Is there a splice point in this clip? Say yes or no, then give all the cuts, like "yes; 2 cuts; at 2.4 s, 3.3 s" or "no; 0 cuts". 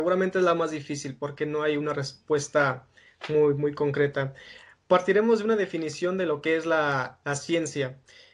no; 0 cuts